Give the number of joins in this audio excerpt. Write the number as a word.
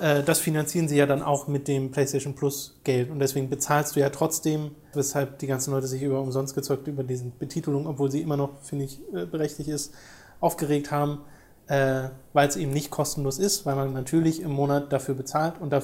one